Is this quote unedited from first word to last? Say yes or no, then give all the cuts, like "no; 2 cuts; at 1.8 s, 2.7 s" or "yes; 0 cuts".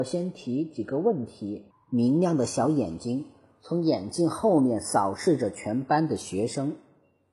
no; 1 cut; at 1.7 s